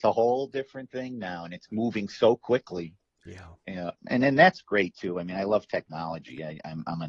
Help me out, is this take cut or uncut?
cut